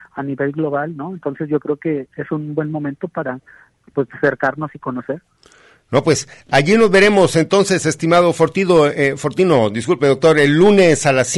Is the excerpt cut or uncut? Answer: uncut